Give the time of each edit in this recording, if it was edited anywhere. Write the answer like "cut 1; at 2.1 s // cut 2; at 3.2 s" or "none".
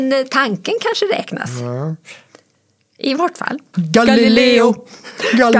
cut 1; at 3.7 s